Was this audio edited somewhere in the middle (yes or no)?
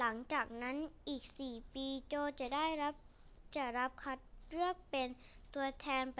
yes